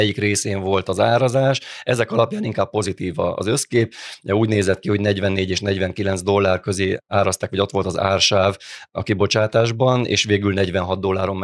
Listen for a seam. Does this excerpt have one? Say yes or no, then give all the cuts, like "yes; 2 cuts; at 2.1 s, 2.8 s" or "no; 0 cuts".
no; 0 cuts